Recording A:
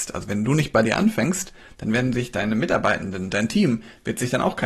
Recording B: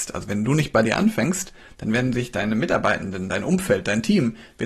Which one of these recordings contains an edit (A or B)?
A